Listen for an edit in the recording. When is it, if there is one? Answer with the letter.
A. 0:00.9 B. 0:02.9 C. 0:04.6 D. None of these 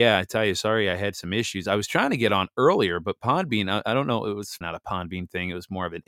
C